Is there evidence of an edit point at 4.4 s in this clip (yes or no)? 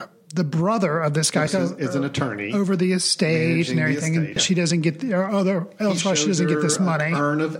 yes